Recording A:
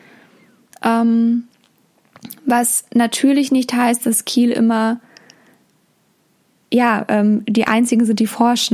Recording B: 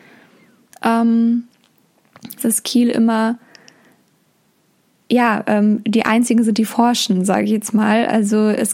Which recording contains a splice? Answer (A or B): B